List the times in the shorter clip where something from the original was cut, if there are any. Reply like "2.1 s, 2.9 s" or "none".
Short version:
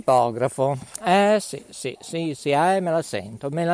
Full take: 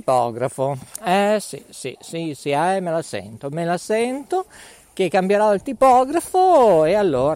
none